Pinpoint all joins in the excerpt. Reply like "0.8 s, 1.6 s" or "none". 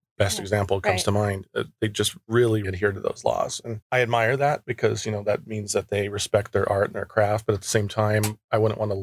2.6 s, 3.8 s